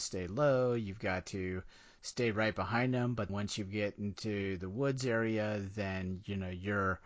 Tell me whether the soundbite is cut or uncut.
cut